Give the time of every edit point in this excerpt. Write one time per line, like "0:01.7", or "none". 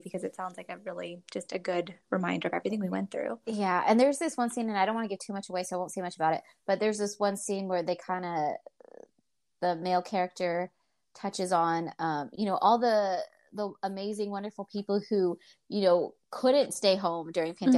0:16.2